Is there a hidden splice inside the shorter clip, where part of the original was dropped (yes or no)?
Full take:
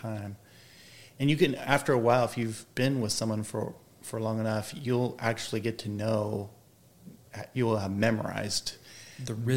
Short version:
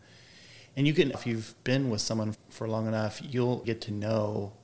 yes